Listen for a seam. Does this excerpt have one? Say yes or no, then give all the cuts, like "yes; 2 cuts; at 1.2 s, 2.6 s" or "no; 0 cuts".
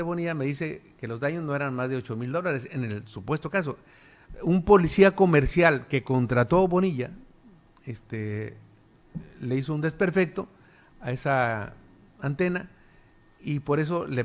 no; 0 cuts